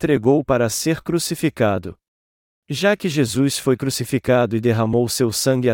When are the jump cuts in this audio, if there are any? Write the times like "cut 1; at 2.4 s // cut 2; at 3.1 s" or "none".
cut 1; at 2.5 s